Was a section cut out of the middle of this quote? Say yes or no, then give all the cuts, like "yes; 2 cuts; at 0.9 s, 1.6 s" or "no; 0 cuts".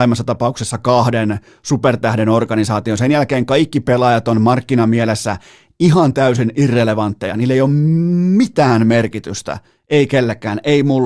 no; 0 cuts